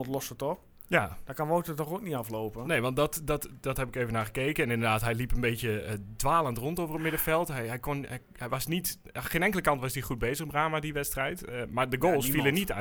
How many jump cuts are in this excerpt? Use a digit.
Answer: 0